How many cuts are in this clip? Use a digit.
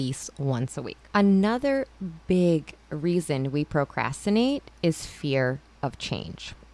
1